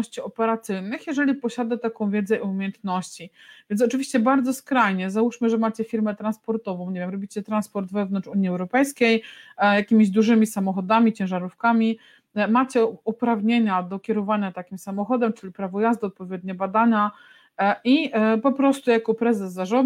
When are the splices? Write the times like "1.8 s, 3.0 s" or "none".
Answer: none